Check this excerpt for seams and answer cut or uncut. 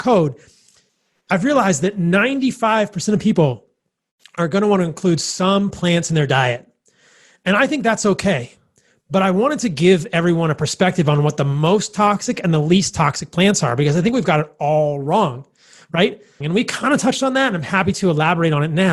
cut